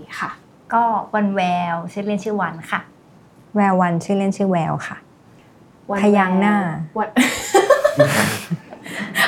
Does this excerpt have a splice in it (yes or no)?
no